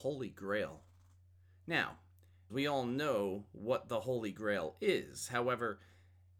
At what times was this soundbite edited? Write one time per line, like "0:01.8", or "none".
0:02.5